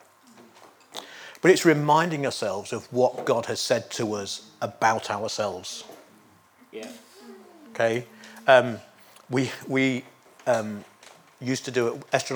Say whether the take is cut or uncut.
uncut